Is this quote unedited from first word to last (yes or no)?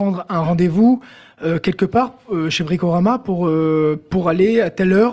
yes